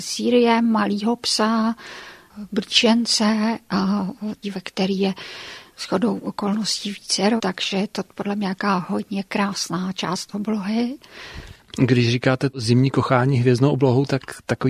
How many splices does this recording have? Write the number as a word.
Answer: two